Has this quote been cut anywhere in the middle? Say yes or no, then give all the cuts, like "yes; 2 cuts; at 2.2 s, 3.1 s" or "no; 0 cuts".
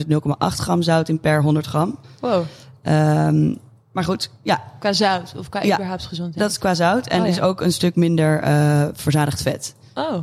no; 0 cuts